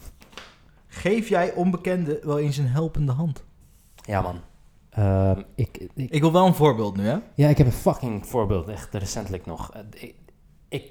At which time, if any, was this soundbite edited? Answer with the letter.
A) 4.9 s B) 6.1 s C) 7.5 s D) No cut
A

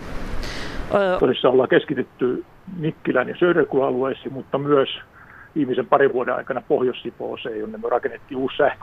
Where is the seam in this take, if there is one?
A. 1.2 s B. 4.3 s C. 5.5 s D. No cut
A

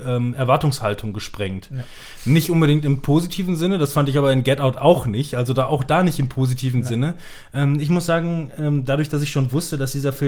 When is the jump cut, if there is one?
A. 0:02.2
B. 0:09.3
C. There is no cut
C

